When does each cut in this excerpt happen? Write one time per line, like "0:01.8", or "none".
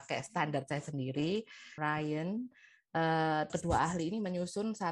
0:01.8
0:03.5